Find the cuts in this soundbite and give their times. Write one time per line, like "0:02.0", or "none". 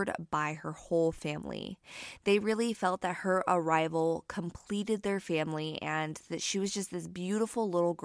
none